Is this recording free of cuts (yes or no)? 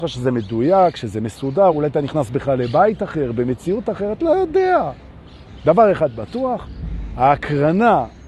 no